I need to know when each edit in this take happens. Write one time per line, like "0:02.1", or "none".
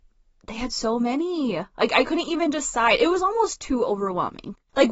none